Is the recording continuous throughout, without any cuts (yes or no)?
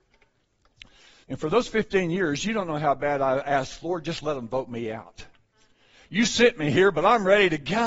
no